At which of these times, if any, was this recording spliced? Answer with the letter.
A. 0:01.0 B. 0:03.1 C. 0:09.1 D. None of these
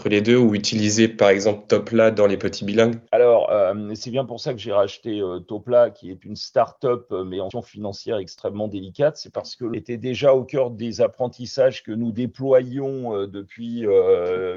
B